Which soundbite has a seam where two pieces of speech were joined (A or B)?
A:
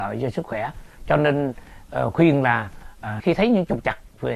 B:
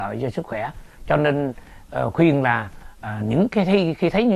A